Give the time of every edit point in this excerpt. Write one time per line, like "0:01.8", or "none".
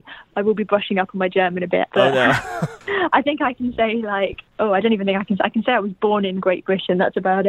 0:01.9